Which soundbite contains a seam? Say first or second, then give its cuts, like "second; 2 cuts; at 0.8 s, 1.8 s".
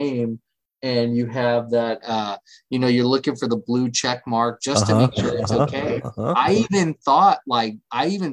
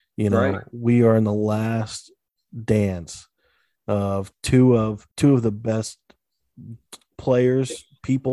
second; 1 cut; at 5.1 s